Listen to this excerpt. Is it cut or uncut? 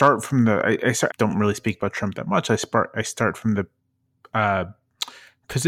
cut